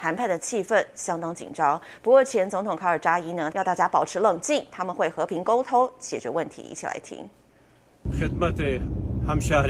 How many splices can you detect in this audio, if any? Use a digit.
1